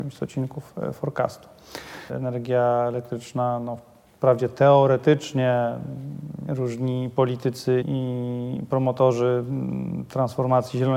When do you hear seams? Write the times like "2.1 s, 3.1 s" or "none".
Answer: 2.1 s, 6.5 s, 7.8 s